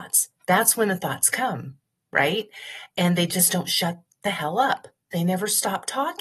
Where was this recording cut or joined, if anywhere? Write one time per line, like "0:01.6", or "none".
none